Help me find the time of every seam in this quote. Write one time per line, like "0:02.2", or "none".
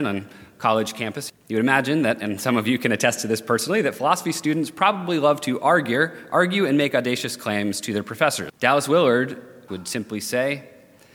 0:01.3
0:08.5
0:09.7